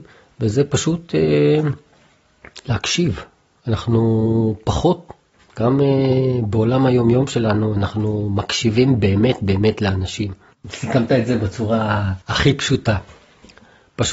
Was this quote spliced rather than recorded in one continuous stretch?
yes; 2 cuts; at 10.5 s, 12.2 s

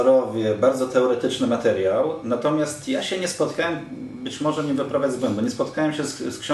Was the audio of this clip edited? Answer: no; 0 cuts

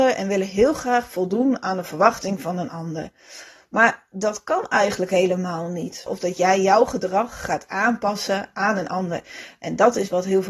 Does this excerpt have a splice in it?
yes; 1 cut; at 6.1 s

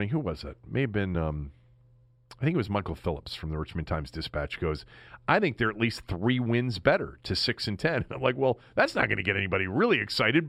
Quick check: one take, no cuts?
yes; 0 cuts

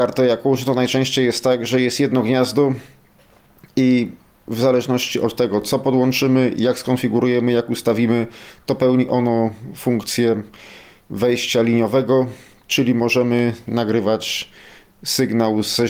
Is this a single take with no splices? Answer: yes; 0 cuts

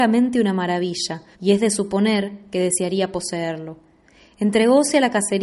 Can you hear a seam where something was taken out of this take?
yes; 1 cut; at 1.3 s

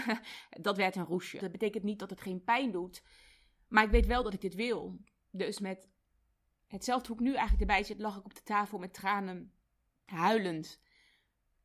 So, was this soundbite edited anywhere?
yes; 1 cut; at 1.4 s

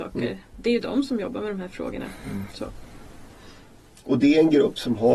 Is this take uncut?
yes; 0 cuts

